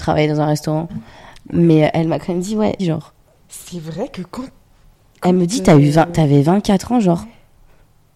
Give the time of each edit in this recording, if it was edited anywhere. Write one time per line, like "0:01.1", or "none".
0:02.8